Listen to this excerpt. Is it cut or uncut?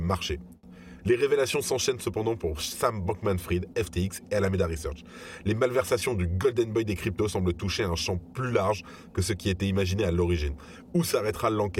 cut